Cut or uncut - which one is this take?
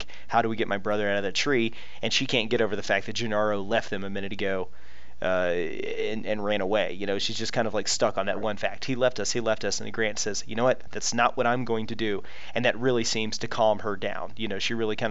uncut